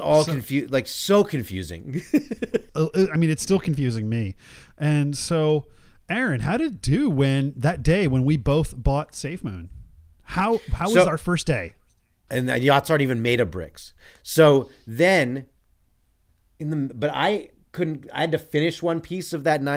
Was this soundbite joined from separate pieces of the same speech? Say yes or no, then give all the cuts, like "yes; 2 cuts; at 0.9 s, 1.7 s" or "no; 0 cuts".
yes; 2 cuts; at 2.7 s, 12.3 s